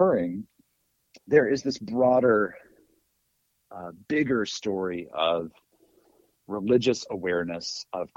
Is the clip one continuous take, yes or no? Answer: yes